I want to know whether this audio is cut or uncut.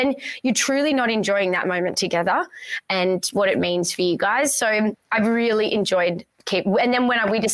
uncut